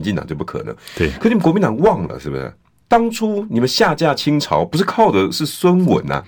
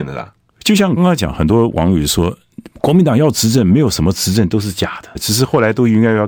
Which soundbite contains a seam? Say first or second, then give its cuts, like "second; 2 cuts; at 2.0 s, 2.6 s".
second; 2 cuts; at 1.0 s, 5.2 s